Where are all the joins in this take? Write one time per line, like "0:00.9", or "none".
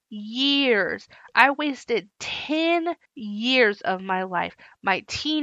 0:01.3
0:03.1